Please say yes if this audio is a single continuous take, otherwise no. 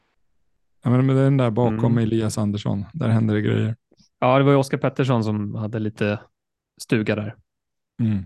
yes